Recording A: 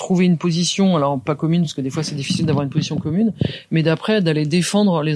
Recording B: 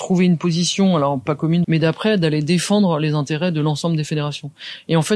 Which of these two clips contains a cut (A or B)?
B